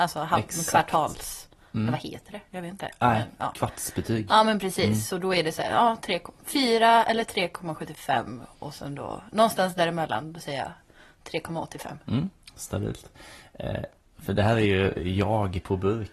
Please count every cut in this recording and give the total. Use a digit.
1